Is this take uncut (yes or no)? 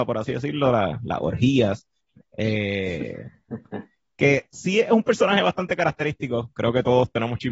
no